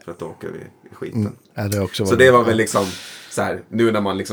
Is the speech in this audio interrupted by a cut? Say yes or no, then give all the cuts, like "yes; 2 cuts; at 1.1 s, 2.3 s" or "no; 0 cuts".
yes; 1 cut; at 1.4 s